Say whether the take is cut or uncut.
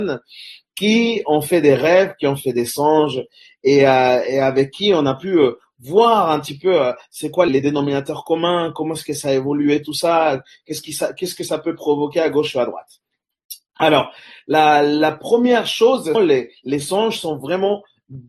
cut